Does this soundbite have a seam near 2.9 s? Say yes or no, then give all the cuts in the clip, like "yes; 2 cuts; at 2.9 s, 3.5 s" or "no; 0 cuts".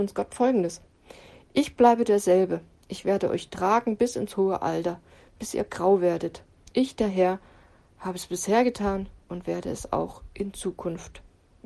no; 0 cuts